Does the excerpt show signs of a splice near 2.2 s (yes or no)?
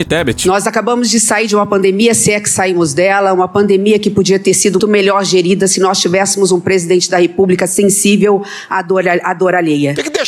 no